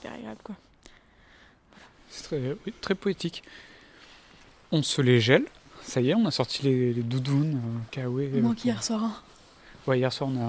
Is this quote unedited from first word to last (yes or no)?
yes